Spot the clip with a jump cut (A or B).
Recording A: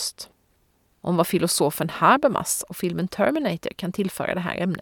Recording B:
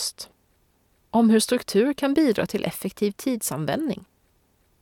A